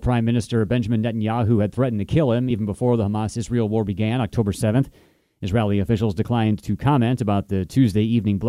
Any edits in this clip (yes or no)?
no